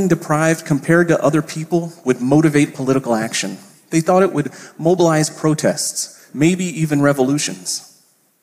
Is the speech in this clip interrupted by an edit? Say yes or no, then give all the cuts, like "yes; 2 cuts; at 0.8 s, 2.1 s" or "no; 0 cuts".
yes; 1 cut; at 6.3 s